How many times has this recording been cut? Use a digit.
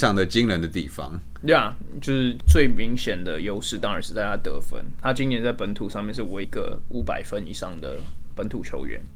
1